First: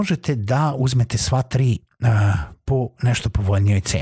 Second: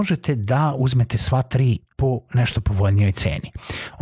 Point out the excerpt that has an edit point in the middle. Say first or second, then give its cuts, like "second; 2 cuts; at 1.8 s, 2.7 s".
second; 1 cut; at 1.9 s